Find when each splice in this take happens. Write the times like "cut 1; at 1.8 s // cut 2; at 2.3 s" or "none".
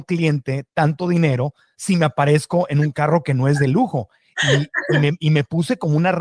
none

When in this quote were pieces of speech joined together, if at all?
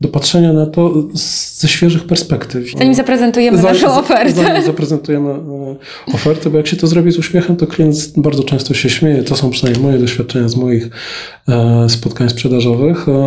cut 1; at 2.7 s

